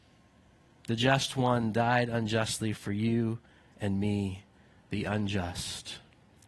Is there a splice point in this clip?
no; 0 cuts

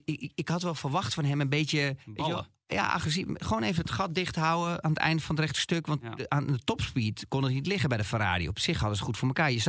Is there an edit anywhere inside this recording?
yes; 1 cut; at 2.0 s

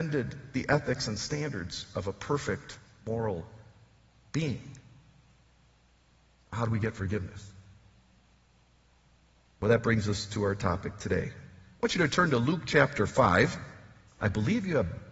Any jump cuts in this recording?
no; 0 cuts

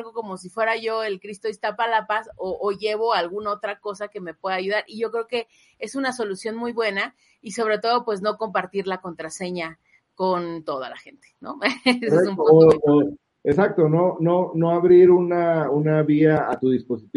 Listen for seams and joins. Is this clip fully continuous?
yes; 0 cuts

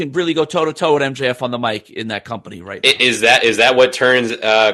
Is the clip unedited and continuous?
yes; 0 cuts

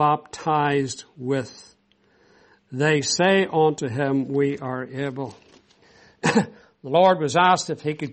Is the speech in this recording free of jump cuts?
yes; 0 cuts

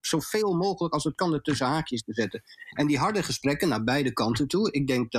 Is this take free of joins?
yes; 0 cuts

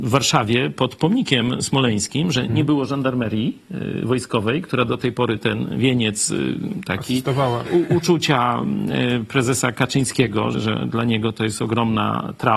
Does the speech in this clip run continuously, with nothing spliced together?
no; 2 cuts; at 7.6 s, 10.5 s

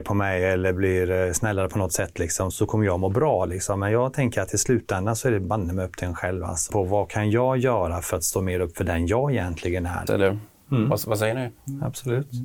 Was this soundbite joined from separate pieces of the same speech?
yes; 3 cuts; at 2.5 s, 6.7 s, 10.1 s

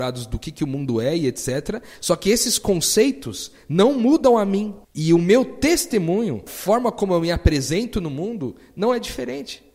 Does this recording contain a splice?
yes; 2 cuts; at 4.8 s, 6.5 s

